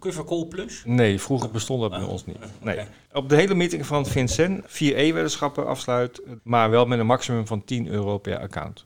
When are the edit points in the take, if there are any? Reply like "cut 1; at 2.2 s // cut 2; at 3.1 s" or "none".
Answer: cut 1; at 6.4 s